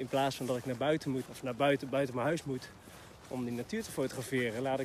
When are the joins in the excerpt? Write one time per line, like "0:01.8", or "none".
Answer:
0:01.3

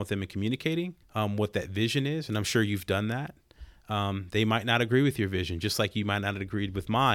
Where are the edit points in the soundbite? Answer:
0:01.0

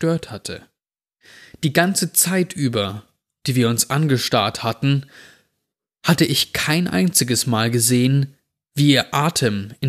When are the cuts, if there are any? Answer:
none

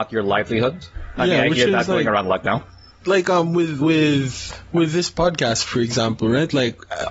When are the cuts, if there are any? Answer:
none

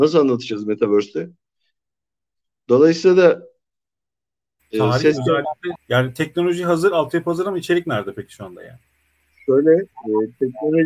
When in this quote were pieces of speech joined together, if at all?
0:05.8

